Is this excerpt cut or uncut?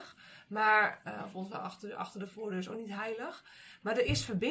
uncut